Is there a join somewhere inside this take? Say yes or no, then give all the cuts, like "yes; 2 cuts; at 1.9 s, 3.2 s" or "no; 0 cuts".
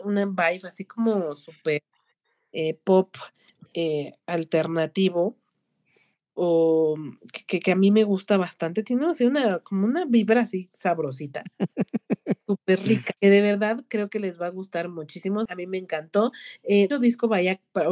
yes; 3 cuts; at 13.2 s, 15.5 s, 16.9 s